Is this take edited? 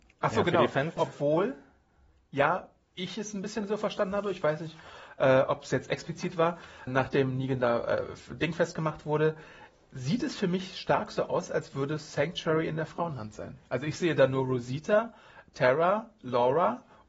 yes; 2 cuts; at 1.0 s, 6.9 s

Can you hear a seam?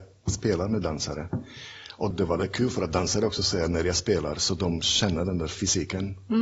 yes; 1 cut; at 2.1 s

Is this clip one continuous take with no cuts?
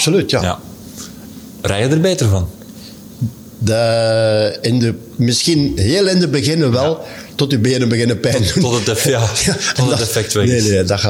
yes; 0 cuts

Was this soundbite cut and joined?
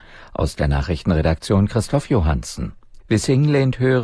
yes; 1 cut; at 3.0 s

